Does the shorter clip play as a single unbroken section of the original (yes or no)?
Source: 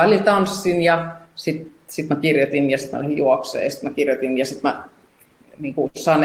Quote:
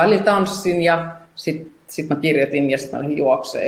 yes